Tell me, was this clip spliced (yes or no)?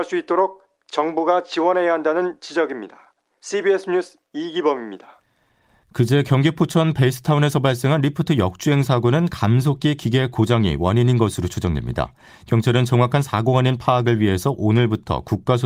no